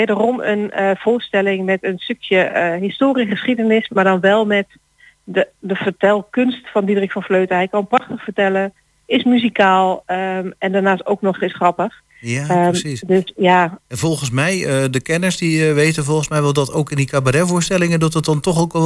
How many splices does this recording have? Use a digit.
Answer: 0